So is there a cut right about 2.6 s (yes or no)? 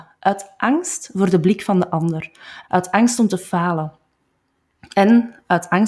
yes